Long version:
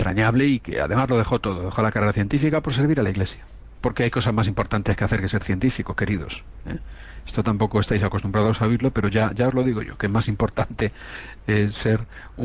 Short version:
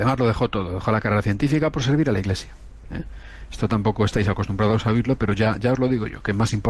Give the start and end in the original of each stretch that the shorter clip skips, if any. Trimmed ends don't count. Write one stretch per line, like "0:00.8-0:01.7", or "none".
0:03.7-0:06.6

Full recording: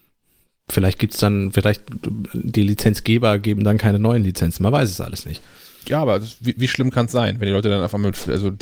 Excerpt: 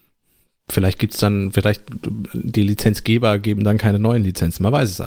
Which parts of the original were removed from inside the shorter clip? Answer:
none

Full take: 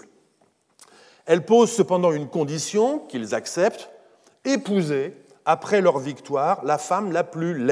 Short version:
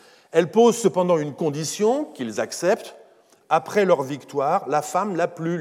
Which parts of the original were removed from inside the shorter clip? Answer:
0:04.4-0:05.4

